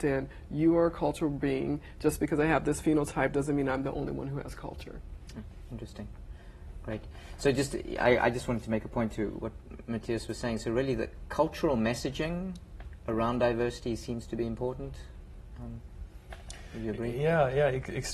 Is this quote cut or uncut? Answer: uncut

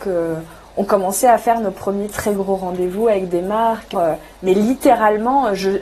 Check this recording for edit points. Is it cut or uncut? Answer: cut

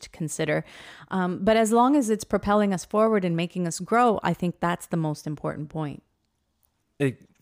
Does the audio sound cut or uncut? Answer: uncut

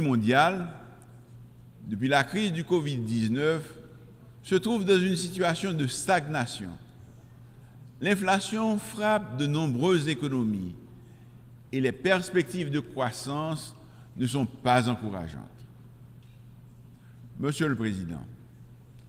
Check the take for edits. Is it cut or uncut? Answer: uncut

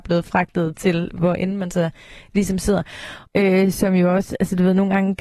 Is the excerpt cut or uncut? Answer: cut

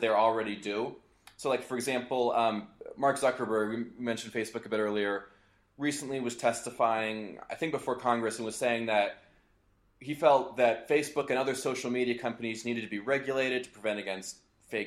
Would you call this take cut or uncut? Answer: uncut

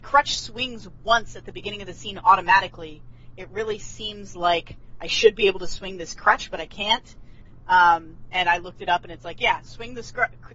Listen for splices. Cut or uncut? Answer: uncut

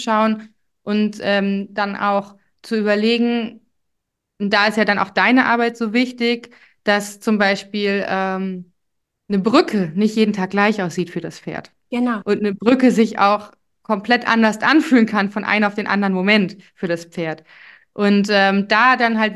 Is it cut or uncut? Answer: uncut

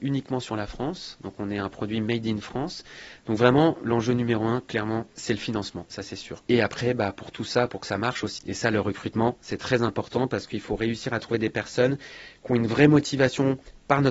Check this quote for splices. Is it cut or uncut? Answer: cut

